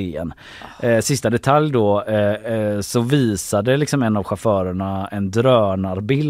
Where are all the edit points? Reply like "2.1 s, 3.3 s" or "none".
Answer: none